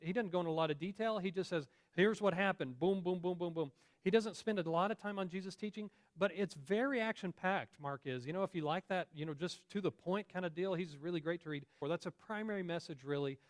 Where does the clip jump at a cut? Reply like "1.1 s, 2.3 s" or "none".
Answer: 11.8 s